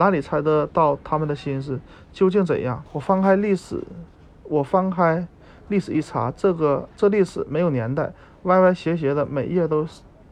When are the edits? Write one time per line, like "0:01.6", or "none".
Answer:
0:02.9